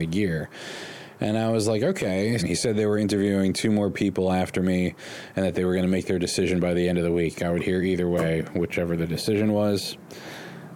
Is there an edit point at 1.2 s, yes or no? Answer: no